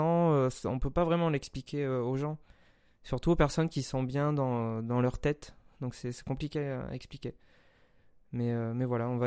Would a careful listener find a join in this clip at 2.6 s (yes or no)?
no